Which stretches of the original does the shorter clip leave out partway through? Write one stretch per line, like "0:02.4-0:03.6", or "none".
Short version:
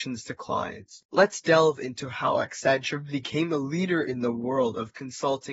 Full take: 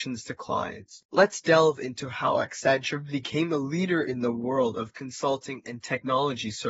none